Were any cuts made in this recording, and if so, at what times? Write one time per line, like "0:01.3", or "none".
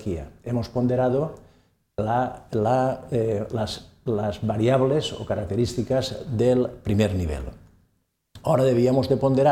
none